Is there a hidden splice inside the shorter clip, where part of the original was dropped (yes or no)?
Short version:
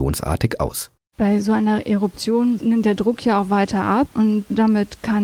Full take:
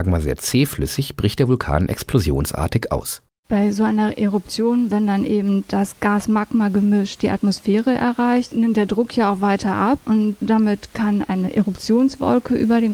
yes